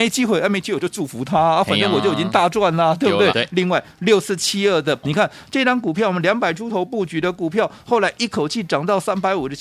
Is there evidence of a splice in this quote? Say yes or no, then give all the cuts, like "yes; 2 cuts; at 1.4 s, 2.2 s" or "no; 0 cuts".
yes; 2 cuts; at 3.3 s, 5.0 s